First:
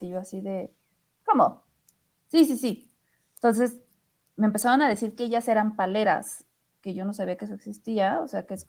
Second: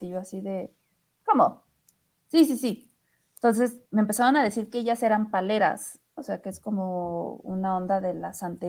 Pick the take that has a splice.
second; 2 cuts; at 3.9 s, 6.2 s

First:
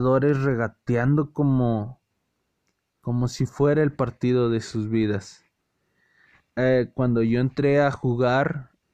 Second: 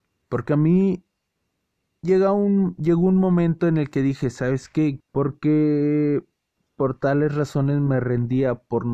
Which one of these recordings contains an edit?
second; 1 cut; at 5.0 s

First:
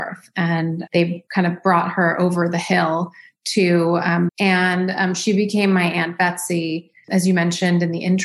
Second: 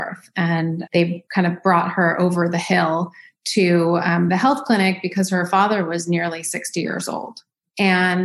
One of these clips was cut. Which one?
first; 2 cuts; at 4.3 s, 7.0 s

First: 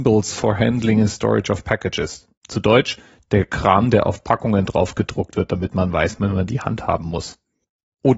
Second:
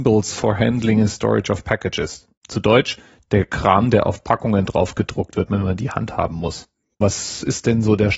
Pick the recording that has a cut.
second; 2 cuts; at 5.5 s, 7.0 s

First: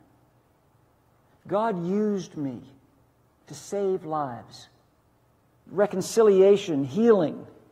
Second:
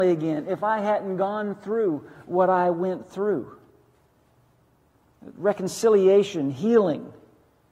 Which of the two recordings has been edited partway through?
first; 1 cut; at 5.7 s

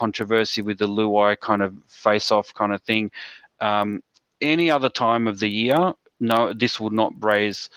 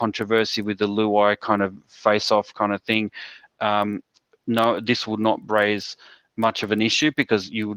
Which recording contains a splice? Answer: second; 1 cut; at 4.3 s

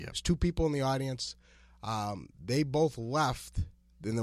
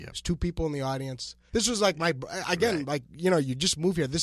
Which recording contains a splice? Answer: second; 1 cut; at 1.5 s

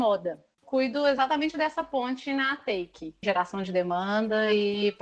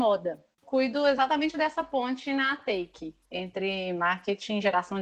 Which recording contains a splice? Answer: first; 1 cut; at 3.2 s

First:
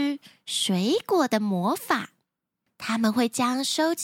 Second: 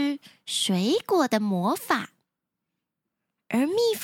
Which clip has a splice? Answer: first; 1 cut; at 2.7 s

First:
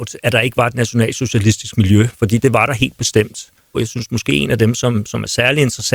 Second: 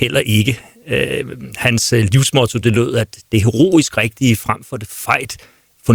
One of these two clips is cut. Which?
first; 1 cut; at 3.7 s

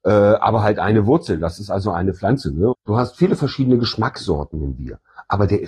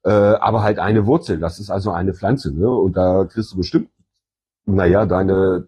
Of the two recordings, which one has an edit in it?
first; 1 cut; at 2.7 s

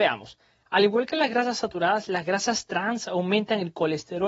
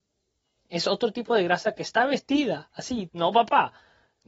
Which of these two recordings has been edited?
second; 1 cut; at 3.1 s

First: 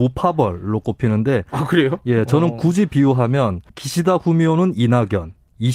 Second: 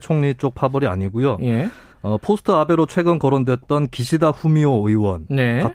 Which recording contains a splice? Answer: first; 1 cut; at 3.7 s

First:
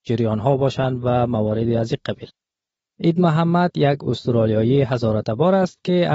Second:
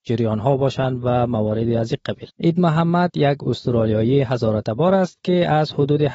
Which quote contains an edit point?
second; 1 cut; at 2.3 s

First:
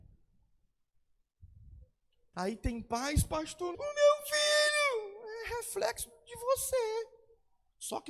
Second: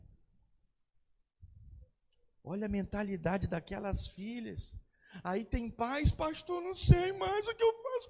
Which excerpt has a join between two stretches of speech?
first; 2 cuts; at 2.3 s, 3.7 s

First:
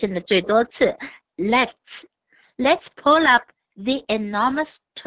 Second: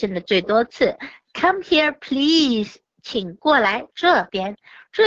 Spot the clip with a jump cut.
first; 1 cut; at 1.2 s

